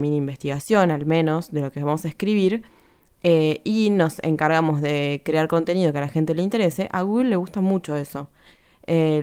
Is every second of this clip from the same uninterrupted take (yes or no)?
yes